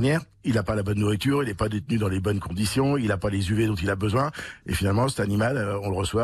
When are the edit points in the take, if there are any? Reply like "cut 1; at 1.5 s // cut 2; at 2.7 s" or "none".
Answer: none